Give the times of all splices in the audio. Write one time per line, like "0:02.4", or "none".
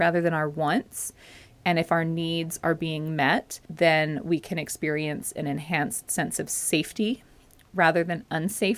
0:03.6